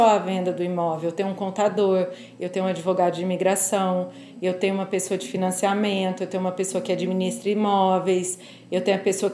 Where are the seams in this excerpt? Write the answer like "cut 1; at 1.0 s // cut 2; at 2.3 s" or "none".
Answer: none